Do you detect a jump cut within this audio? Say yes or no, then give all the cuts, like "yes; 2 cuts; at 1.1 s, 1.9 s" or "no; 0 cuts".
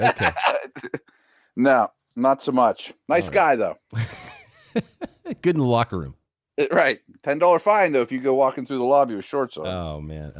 no; 0 cuts